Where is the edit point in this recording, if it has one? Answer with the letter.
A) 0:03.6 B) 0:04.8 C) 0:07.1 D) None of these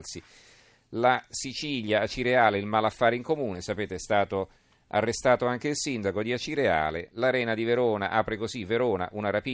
D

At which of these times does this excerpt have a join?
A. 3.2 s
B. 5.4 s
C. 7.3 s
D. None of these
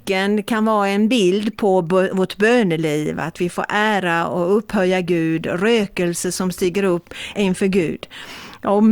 C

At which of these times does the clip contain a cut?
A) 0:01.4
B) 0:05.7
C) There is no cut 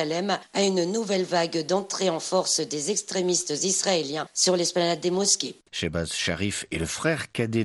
B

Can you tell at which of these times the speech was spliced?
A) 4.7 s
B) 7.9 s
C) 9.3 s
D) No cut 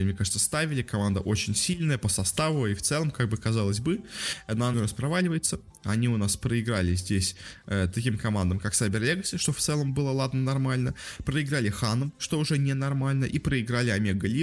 A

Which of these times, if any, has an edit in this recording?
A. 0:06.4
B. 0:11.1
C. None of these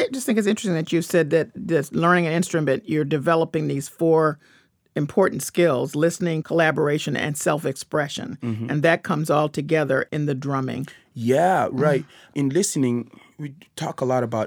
A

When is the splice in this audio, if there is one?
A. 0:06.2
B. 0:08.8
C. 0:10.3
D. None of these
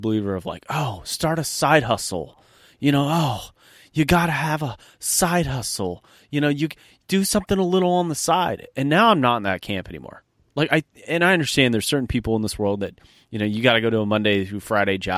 D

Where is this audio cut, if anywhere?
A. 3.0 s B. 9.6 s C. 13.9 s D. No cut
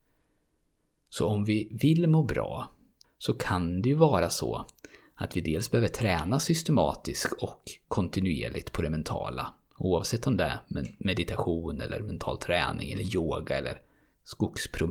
A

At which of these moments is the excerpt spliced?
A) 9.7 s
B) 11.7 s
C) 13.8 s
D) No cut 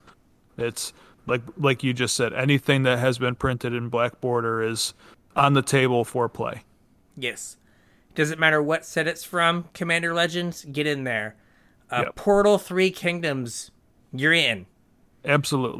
D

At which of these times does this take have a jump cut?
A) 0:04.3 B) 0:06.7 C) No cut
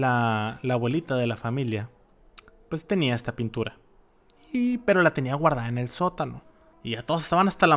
B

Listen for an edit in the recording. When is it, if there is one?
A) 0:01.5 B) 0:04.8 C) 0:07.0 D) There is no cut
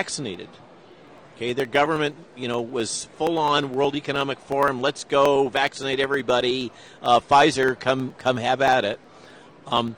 D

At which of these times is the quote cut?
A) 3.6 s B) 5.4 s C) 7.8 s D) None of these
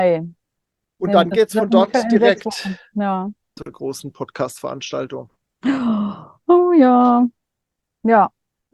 A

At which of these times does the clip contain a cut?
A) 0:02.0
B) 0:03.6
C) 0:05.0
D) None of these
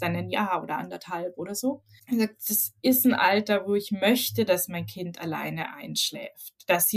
A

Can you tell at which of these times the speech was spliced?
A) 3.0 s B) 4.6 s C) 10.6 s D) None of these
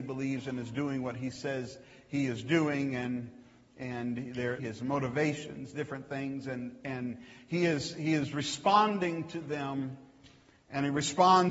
B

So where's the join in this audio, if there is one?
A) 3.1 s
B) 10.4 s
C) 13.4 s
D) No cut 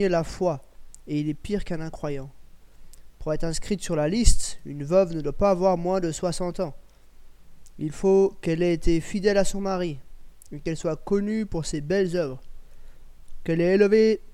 D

